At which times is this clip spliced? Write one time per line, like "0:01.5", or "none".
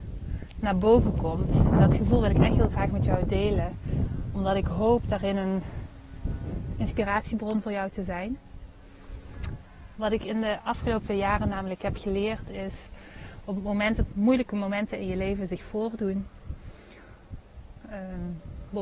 0:10.0
0:14.1
0:17.8